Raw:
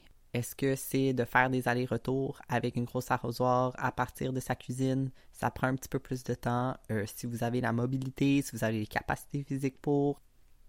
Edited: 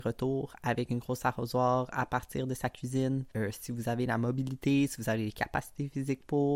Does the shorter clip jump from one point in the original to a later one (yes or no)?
yes